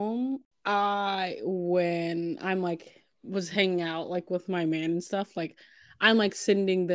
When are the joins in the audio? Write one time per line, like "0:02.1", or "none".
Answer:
none